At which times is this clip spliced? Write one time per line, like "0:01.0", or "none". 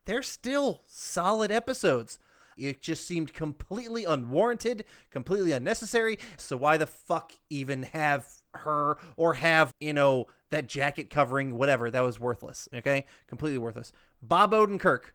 0:02.6
0:06.4
0:09.7